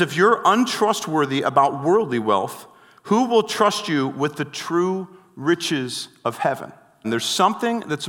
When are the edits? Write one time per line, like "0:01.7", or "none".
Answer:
0:07.0